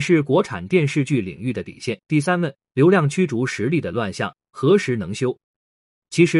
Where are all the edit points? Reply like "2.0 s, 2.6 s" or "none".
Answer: 2.0 s